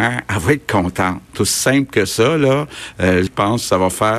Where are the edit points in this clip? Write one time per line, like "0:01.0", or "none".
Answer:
0:03.3